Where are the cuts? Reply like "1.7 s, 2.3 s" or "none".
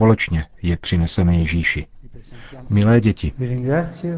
2.6 s